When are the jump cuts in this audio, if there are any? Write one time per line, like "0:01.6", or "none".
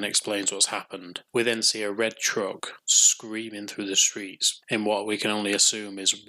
none